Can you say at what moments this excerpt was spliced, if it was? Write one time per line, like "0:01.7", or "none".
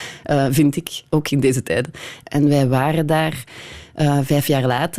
0:02.2